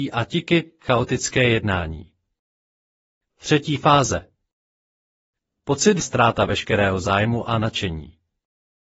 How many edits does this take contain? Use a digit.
1